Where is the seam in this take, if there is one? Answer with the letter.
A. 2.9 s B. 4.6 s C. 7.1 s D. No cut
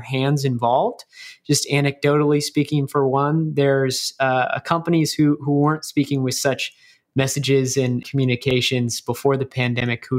D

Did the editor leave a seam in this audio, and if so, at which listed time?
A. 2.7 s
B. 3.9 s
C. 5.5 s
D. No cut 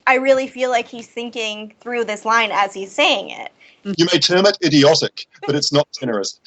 B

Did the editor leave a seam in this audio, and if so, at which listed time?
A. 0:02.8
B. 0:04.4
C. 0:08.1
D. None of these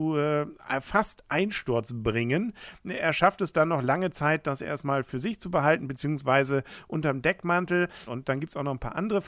C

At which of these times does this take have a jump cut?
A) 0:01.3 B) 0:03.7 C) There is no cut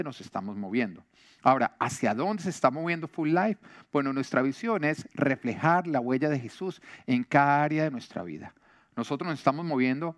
C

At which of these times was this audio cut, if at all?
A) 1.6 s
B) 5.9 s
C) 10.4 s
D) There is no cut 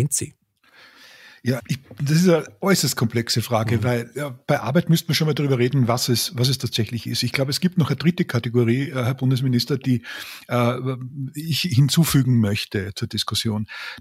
A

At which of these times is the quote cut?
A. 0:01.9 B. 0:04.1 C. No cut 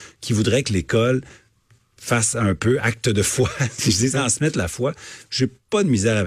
B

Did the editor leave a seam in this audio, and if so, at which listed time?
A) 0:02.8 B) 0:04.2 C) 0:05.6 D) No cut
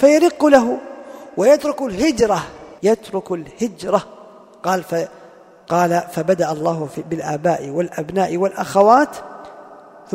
A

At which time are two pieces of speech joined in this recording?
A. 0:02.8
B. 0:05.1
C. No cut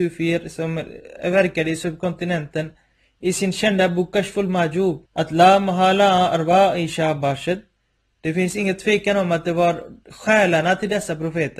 B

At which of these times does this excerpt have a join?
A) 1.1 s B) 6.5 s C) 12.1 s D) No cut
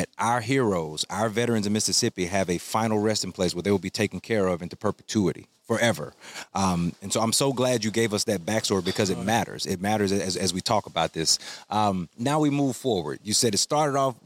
C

